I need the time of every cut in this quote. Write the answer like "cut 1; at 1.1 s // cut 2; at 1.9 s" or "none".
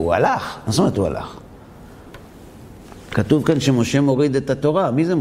none